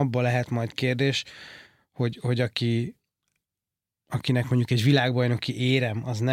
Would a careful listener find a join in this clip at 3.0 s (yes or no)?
no